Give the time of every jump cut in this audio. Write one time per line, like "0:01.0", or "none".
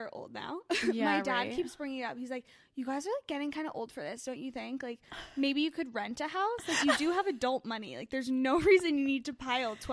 none